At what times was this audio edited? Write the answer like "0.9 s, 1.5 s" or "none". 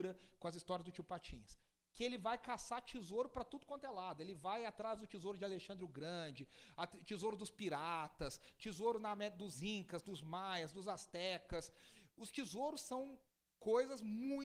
none